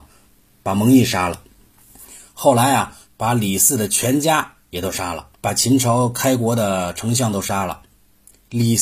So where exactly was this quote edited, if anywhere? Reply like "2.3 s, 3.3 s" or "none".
3.0 s, 5.4 s